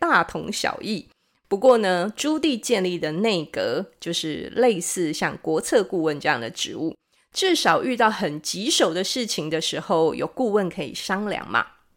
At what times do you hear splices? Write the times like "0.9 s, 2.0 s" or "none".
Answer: none